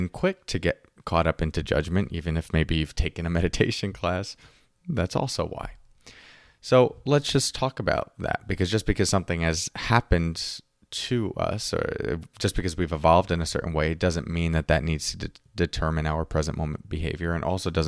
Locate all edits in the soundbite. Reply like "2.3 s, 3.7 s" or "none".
none